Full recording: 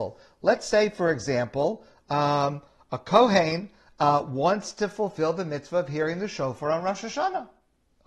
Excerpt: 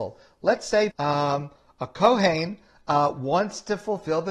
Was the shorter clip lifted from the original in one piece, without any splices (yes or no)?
no